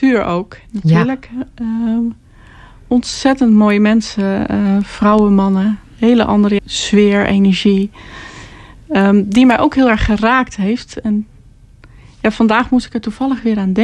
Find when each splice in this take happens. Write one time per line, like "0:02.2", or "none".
0:06.6